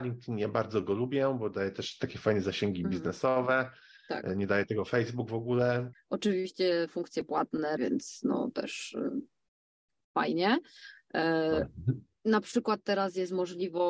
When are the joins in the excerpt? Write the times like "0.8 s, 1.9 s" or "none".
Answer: 5.9 s, 7.8 s